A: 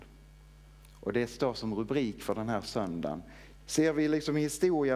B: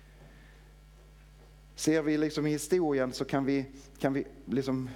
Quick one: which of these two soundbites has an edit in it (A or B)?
A